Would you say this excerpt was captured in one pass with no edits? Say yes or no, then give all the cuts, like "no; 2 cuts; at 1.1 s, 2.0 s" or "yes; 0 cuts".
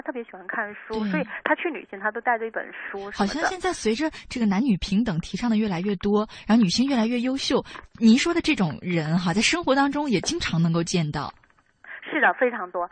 yes; 0 cuts